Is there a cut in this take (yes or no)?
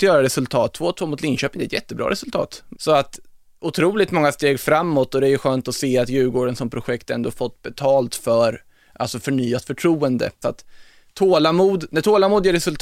yes